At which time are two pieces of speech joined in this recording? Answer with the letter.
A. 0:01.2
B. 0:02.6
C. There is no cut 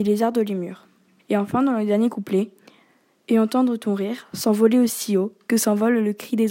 A